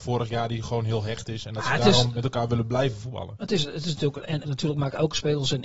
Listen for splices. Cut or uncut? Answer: cut